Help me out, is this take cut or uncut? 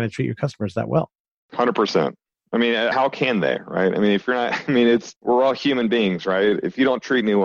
cut